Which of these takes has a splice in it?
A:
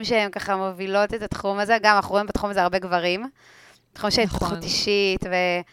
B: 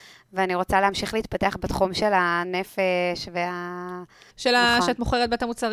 B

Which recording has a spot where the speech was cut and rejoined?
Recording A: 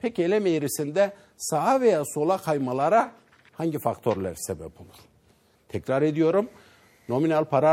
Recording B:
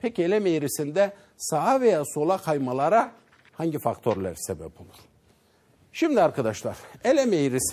A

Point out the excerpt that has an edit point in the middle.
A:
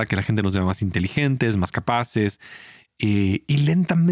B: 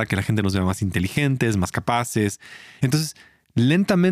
B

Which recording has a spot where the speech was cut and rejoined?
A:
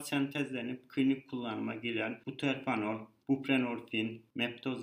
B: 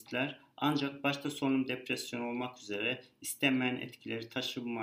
A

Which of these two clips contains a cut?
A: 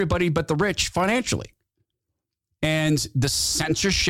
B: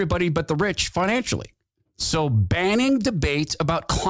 B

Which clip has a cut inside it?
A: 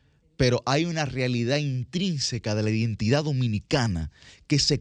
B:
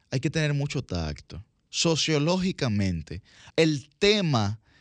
B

